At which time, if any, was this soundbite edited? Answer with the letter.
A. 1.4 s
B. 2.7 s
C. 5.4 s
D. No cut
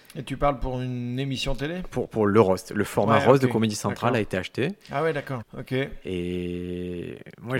C